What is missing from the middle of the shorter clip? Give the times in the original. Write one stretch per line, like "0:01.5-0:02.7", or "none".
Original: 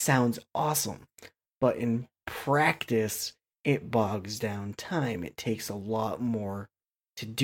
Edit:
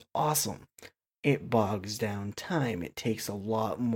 0:01.5-0:03.6